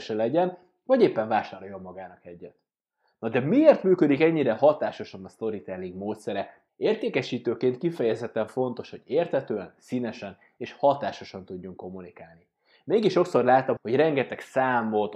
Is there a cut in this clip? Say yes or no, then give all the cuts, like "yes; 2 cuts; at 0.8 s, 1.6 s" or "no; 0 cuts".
yes; 2 cuts; at 6.7 s, 13.8 s